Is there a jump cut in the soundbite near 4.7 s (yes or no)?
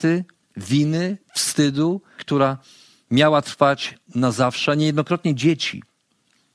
no